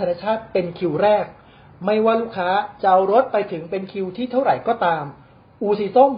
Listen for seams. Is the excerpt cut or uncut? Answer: uncut